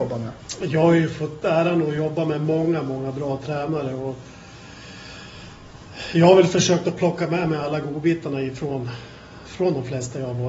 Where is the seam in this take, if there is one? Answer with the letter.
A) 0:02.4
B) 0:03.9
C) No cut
C